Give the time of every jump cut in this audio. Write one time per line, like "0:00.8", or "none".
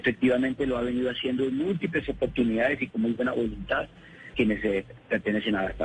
0:04.3